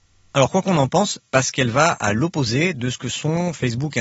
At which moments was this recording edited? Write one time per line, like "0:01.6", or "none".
0:01.2